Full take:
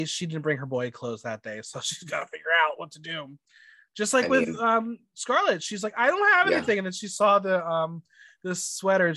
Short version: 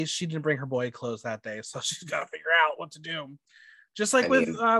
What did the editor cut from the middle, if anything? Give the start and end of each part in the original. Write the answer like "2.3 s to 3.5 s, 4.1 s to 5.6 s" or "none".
none